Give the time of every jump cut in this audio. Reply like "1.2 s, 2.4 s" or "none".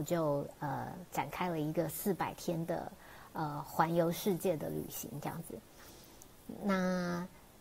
none